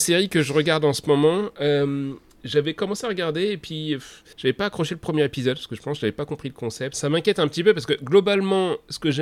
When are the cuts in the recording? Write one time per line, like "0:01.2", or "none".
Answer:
0:04.3
0:06.9